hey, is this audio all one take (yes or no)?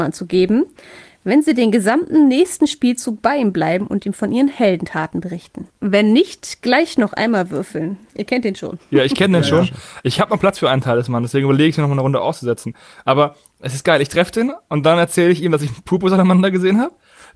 yes